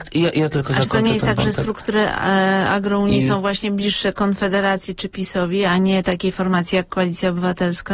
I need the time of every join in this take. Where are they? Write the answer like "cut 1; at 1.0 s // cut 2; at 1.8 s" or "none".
none